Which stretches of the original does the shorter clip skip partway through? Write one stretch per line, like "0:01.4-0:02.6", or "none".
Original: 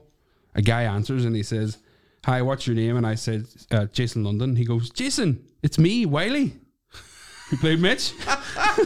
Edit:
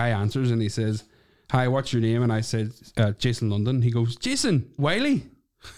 0:05.5-0:06.1

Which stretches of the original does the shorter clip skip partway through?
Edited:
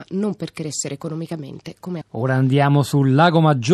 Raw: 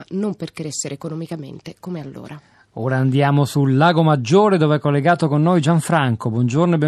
0:02.0-0:02.6

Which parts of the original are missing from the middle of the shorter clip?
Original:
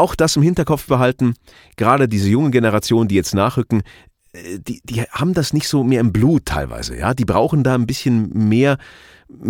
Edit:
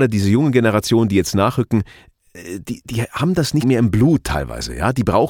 0:05.6-0:05.8

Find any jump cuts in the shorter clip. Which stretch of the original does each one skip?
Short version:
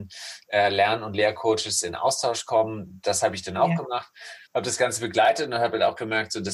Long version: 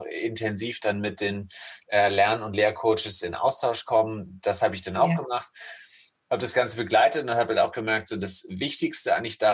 0:05.8-0:06.2

